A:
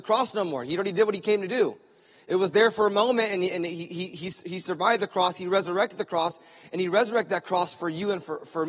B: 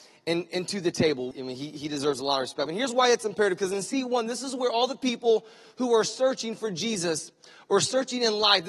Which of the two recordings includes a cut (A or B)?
B